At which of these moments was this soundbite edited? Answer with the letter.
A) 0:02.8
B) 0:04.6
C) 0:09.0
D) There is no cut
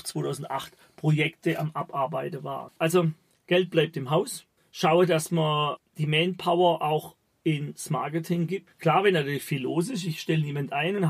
D